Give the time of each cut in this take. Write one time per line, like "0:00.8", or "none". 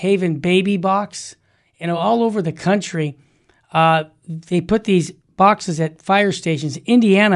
none